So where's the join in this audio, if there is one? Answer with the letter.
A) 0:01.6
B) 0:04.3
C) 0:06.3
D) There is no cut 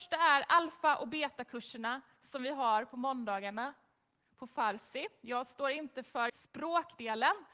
C